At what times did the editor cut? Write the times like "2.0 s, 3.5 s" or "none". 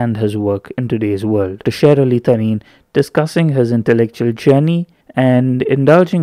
1.6 s, 5.0 s